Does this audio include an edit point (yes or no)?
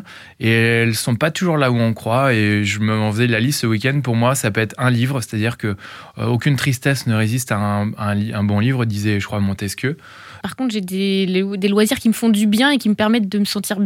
yes